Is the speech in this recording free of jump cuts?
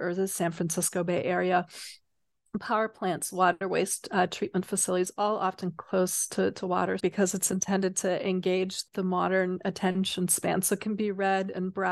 no; 2 cuts; at 7.0 s, 8.9 s

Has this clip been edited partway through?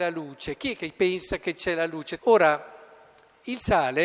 yes; 1 cut; at 2.2 s

